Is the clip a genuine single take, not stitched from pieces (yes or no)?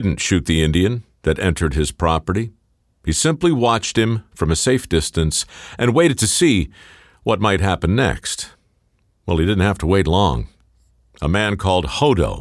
yes